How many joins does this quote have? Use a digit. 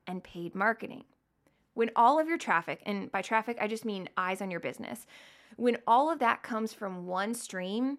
0